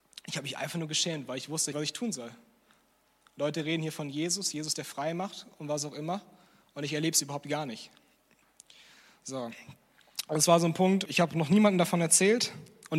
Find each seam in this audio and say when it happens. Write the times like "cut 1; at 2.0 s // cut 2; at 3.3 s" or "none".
cut 1; at 1.7 s // cut 2; at 11.1 s